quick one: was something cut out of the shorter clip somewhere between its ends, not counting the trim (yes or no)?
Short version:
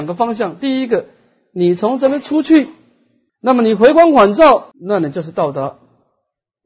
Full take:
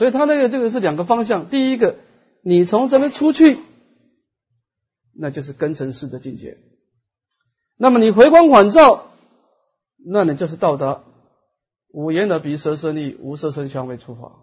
yes